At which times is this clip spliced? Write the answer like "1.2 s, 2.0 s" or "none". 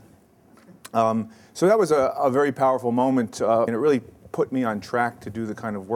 3.7 s